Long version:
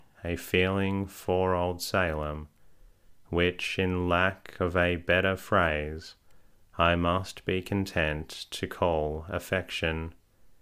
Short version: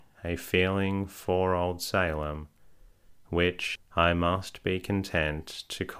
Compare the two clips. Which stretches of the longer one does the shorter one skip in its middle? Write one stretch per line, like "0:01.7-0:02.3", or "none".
0:03.8-0:06.6

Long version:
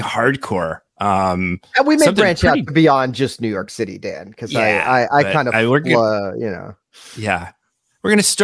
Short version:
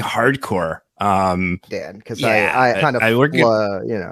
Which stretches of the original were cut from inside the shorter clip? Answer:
0:01.7-0:04.0
0:05.1-0:05.3

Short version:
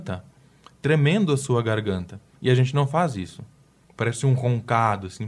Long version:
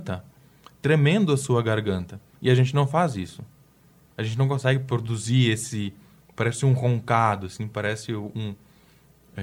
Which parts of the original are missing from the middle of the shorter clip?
0:03.8-0:06.2

